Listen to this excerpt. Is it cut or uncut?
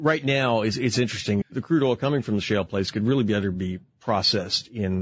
cut